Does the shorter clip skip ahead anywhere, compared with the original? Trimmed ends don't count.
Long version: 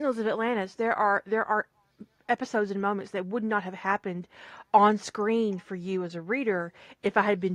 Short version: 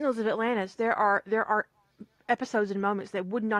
no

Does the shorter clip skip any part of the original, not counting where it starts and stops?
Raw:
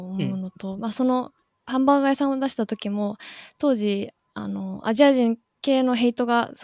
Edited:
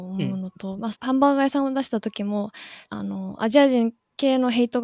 yes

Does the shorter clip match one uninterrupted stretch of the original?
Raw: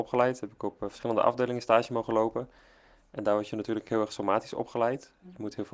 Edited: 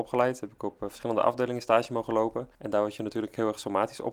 no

